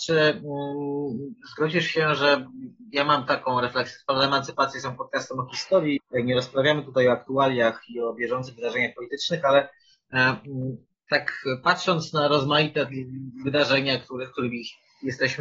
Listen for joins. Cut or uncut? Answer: cut